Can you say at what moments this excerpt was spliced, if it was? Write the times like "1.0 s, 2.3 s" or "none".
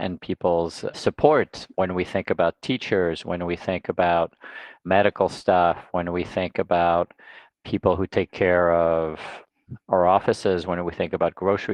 0.9 s